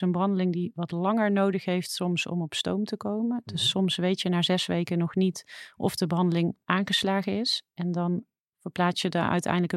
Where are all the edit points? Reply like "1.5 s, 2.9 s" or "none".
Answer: none